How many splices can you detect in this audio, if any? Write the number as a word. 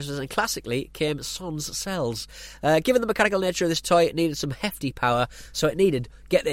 zero